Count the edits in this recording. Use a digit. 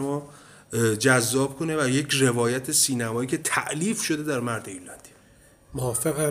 0